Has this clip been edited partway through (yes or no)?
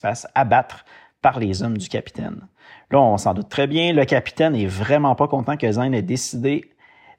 no